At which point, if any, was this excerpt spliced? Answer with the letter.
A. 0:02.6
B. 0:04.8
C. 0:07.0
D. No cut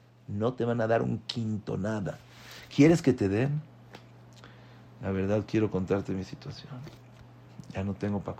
D